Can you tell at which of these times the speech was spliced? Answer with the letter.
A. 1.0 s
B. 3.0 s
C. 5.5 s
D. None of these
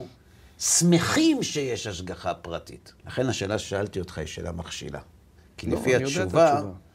B